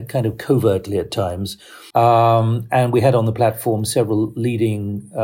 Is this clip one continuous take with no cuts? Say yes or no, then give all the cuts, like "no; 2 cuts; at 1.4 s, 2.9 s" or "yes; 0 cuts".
no; 1 cut; at 1.9 s